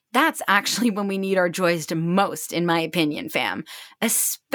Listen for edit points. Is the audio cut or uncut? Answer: uncut